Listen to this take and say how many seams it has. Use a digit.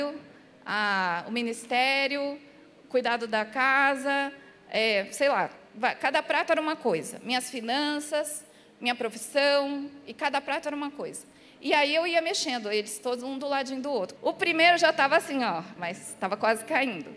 2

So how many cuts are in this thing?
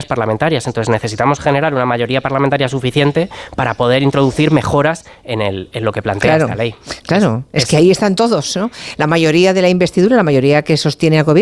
1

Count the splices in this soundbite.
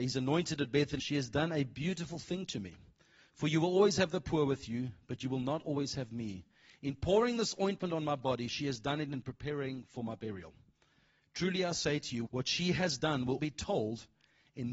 3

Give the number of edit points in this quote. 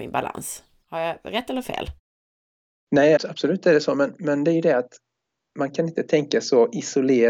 1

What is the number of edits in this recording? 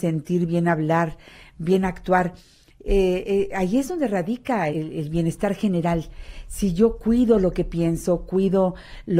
1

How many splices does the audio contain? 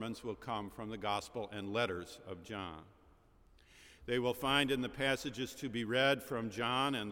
1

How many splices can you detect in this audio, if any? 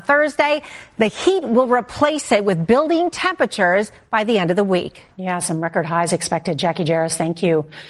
1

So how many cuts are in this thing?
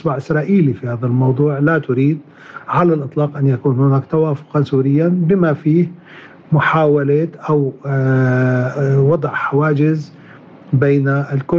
1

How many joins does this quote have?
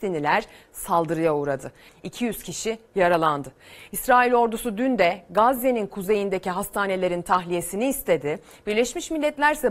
1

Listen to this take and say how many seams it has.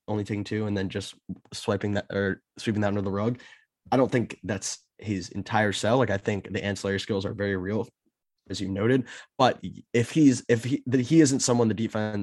1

